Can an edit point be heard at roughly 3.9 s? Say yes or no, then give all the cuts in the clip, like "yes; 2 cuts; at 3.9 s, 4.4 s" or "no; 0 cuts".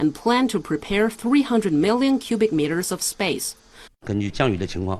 yes; 1 cut; at 3.9 s